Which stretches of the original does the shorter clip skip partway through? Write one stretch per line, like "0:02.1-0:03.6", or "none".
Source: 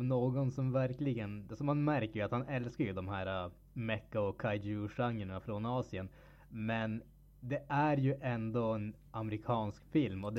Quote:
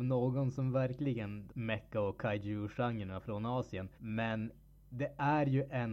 0:01.5-0:03.7
0:06.1-0:06.5